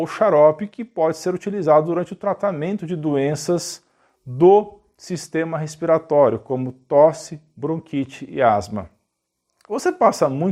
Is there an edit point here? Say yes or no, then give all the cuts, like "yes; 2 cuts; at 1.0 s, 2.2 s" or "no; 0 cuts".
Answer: no; 0 cuts